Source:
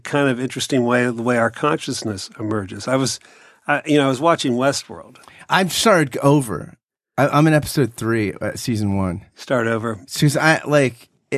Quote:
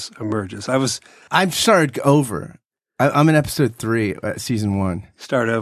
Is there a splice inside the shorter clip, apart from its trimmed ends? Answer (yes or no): yes